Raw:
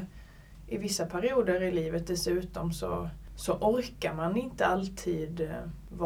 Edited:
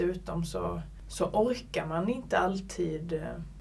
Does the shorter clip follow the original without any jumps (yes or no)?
yes